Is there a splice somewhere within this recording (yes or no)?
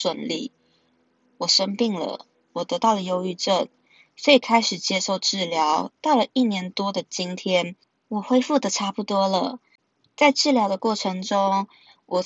no